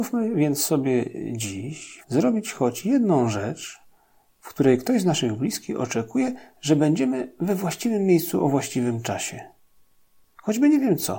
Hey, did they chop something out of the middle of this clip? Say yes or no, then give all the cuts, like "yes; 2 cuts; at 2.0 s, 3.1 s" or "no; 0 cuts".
yes; 1 cut; at 2.0 s